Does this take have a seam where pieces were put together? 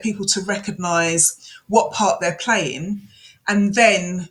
no; 0 cuts

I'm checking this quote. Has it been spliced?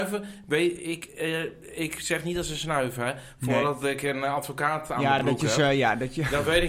no; 0 cuts

